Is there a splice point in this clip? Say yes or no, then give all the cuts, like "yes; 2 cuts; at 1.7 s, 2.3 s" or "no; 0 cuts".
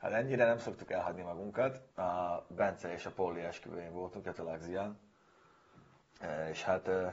yes; 1 cut; at 1.9 s